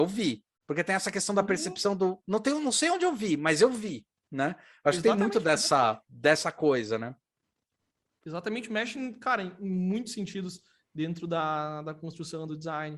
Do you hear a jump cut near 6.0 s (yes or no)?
yes